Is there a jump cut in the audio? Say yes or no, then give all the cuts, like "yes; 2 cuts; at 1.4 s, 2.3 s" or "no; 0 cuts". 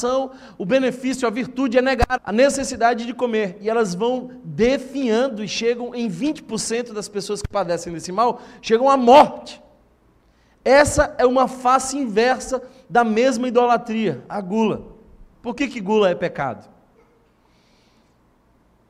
yes; 2 cuts; at 2.2 s, 15.3 s